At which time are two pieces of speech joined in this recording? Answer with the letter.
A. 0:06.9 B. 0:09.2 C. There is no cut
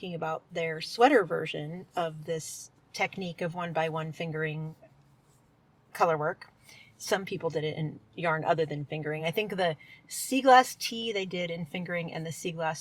C